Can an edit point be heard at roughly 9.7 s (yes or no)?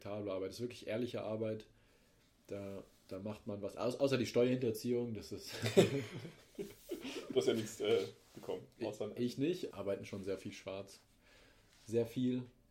yes